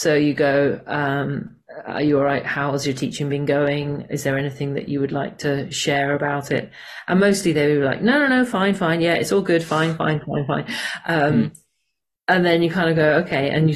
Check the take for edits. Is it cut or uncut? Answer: uncut